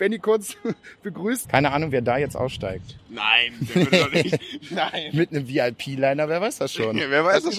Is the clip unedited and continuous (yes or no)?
no